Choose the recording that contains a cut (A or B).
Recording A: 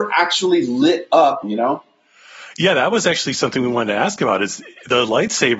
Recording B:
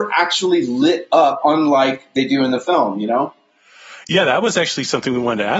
A